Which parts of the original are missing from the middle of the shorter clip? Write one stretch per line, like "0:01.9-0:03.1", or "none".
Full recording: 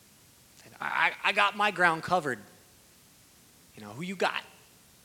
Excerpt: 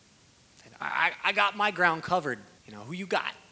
0:02.6-0:03.7